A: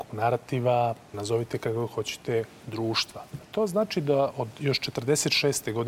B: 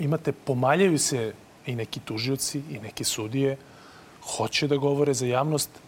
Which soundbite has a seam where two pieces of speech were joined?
A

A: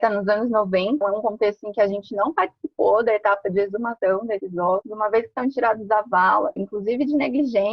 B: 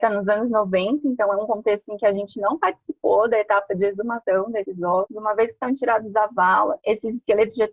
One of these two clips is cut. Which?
A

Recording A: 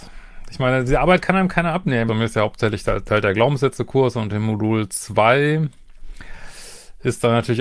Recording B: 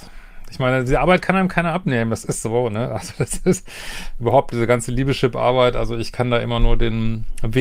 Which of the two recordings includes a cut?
A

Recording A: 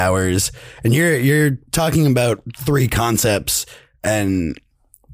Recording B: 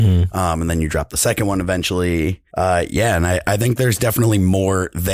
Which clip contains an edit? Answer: B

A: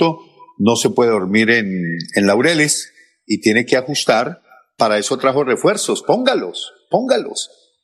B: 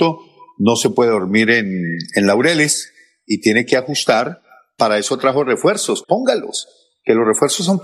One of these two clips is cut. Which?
B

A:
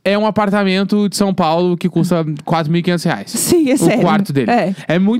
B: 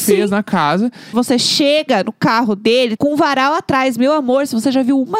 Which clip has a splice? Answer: B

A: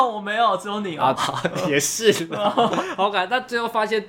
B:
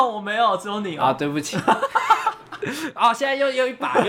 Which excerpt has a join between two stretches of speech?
A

